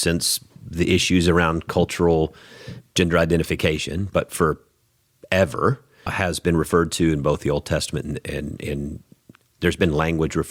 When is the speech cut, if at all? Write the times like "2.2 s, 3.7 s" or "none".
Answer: 6.1 s